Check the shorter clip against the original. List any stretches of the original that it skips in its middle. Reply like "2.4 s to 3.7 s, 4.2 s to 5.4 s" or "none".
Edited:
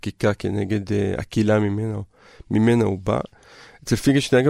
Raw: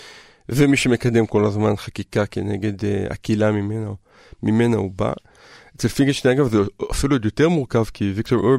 none